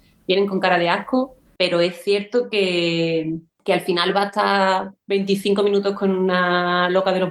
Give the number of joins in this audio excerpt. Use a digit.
2